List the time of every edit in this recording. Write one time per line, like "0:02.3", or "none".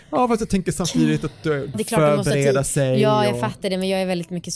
0:01.7